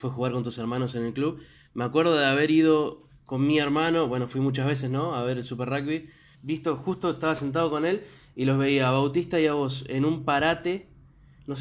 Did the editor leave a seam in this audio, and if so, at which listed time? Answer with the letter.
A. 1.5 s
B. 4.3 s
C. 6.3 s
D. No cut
C